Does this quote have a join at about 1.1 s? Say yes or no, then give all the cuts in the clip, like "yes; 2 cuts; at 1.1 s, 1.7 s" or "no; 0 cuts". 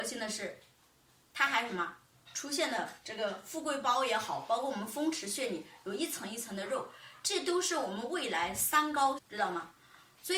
no; 1 cut; at 9.2 s